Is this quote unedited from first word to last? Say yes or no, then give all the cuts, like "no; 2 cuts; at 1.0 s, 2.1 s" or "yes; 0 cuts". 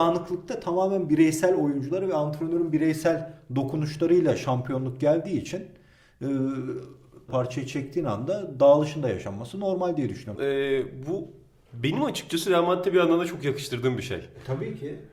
no; 2 cuts; at 7.3 s, 10.4 s